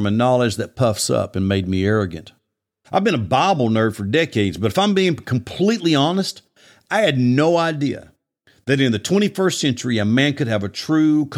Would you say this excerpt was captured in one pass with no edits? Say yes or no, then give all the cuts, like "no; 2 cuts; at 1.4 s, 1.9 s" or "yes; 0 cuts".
no; 1 cut; at 2.8 s